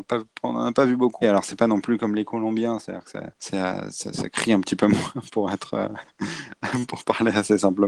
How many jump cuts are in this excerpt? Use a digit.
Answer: 1